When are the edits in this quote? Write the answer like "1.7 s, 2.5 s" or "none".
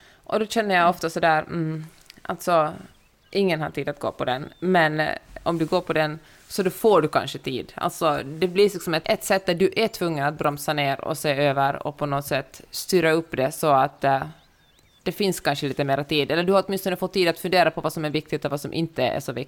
9.0 s